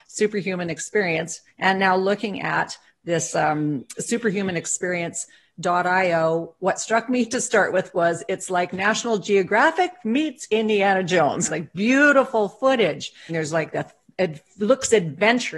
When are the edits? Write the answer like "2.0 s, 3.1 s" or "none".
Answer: 11.5 s, 13.3 s